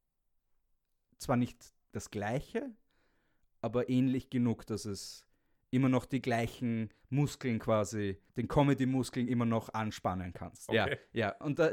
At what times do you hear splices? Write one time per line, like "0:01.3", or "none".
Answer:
0:01.8
0:08.3
0:10.7